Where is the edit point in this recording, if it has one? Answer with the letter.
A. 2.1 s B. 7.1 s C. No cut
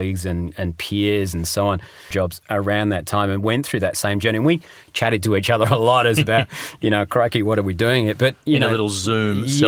A